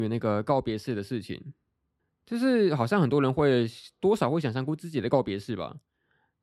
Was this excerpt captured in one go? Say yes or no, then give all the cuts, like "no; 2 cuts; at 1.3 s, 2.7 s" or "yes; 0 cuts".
yes; 0 cuts